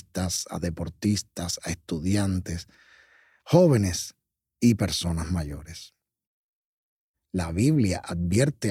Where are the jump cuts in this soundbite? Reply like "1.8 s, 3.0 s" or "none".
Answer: 7.1 s